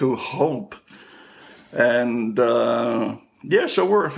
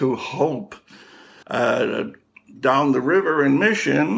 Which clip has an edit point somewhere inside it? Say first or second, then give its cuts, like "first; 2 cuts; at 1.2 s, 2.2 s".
second; 1 cut; at 1.4 s